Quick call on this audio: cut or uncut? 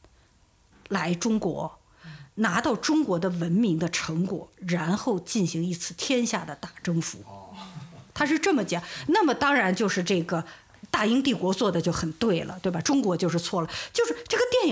uncut